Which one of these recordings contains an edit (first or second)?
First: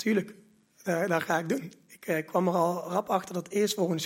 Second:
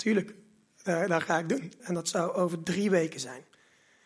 second